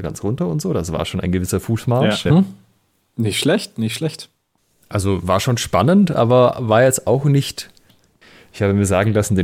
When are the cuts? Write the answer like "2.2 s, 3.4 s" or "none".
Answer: 2.3 s, 7.9 s